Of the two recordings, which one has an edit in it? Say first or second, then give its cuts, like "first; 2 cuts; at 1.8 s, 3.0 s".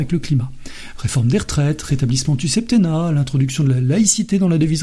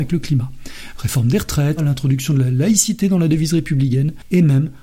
second; 1 cut; at 1.8 s